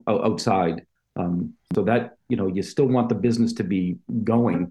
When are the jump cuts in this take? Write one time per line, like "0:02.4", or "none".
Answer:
0:01.0